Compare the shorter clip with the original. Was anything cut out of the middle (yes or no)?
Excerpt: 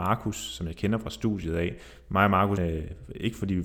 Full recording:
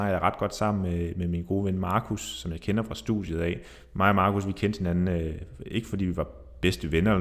yes